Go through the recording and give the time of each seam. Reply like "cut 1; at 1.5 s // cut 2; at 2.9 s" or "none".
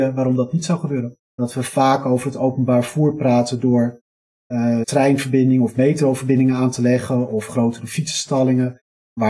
cut 1; at 1.3 s // cut 2; at 4.8 s